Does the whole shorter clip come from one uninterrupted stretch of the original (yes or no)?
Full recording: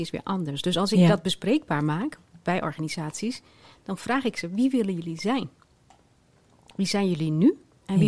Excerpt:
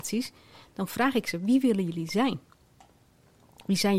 yes